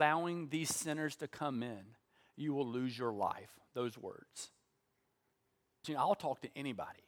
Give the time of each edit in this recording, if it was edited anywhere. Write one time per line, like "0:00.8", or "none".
0:05.8